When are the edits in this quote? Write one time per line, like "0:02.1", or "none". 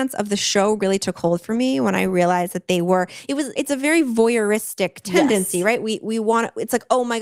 0:03.6